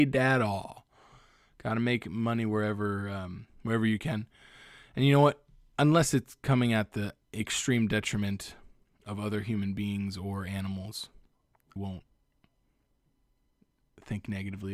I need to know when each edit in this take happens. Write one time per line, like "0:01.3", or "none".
0:11.8